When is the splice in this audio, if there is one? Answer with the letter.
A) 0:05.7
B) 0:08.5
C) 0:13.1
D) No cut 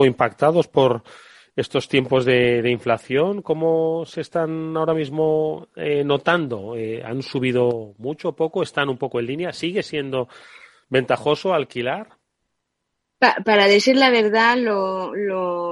D